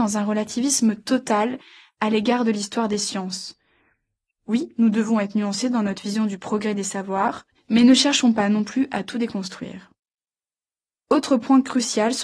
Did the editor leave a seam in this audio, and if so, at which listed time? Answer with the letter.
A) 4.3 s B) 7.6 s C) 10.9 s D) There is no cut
B